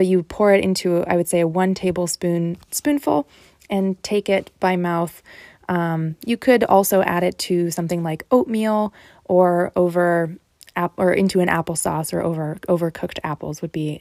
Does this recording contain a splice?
no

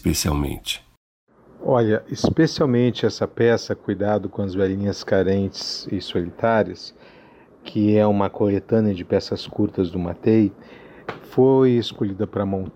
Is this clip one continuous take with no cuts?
yes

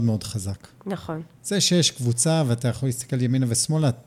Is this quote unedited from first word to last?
yes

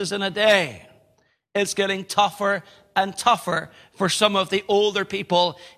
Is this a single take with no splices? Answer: yes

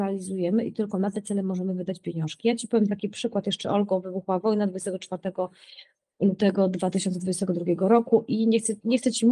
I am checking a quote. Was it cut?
no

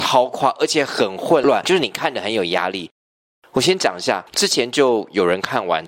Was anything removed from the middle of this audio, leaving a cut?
no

